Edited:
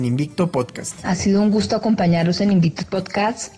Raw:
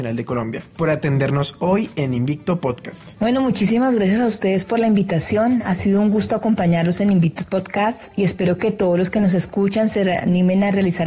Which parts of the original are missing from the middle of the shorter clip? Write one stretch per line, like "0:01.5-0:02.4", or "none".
0:03.1-0:05.6